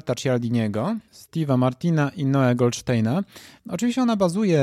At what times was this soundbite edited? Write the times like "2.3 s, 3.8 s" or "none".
3.6 s